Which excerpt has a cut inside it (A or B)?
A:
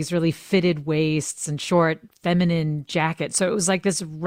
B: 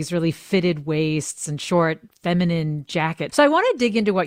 B